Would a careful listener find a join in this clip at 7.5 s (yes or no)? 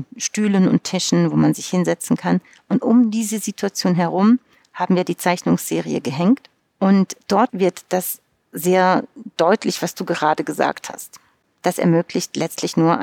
yes